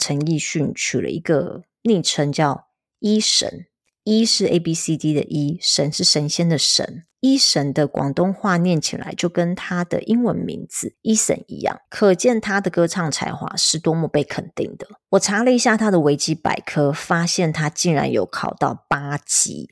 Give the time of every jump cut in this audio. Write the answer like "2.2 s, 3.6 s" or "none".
7.1 s